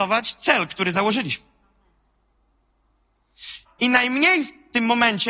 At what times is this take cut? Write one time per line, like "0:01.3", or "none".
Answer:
0:03.6